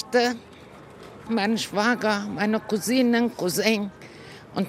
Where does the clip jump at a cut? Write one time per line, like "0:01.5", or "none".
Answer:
0:01.3